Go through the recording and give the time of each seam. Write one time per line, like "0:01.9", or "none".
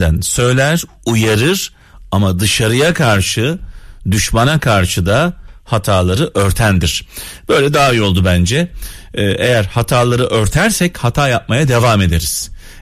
none